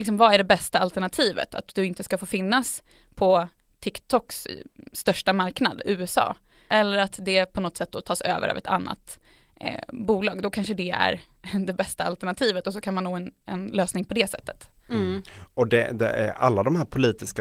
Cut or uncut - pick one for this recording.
uncut